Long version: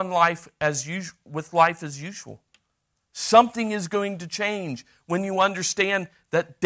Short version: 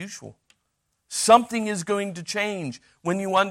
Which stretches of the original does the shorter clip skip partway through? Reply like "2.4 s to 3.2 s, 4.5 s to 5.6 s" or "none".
none